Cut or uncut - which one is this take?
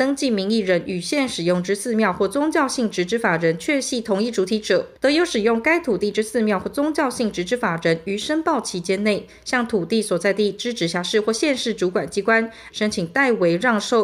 cut